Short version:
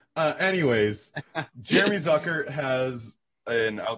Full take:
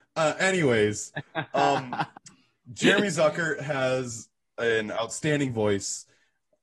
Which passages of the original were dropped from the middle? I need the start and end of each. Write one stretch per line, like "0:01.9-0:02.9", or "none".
0:01.5-0:02.6